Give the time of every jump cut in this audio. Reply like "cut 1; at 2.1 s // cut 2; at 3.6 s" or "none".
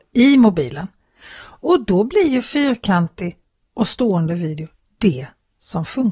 none